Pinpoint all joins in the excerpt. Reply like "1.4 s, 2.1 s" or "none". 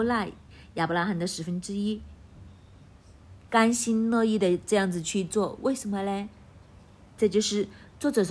3.5 s